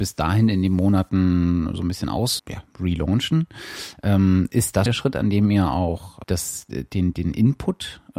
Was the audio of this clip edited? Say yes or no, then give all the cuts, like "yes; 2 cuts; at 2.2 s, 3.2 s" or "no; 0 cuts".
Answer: yes; 3 cuts; at 2.4 s, 4.9 s, 6.2 s